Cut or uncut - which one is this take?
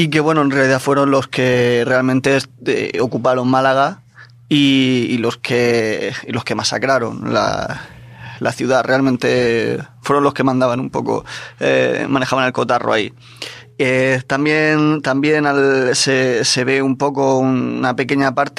uncut